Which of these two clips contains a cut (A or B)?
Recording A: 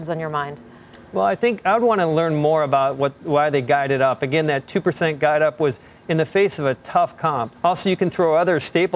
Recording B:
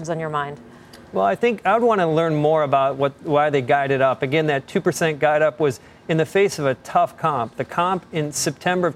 A